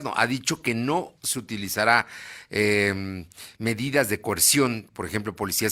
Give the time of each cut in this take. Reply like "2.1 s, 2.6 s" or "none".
none